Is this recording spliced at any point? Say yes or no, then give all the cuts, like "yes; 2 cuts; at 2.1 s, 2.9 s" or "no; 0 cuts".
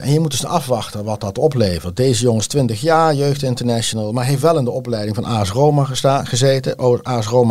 no; 0 cuts